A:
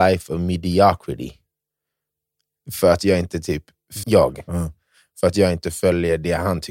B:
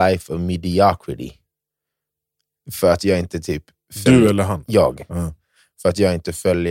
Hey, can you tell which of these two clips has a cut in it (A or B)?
A